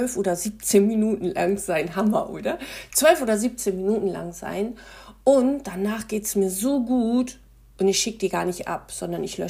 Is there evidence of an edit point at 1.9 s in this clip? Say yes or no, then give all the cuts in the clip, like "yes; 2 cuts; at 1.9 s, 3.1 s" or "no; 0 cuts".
no; 0 cuts